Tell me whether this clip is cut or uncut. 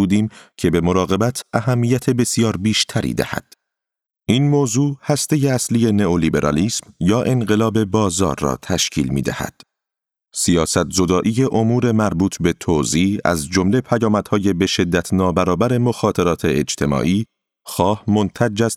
cut